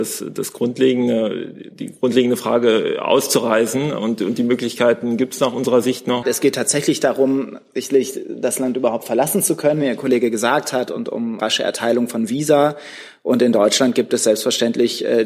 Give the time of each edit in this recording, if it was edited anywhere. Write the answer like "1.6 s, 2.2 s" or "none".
6.2 s, 11.4 s